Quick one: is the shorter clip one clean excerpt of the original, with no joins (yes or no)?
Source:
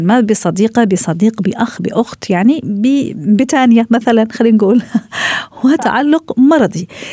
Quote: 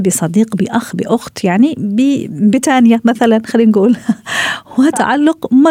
yes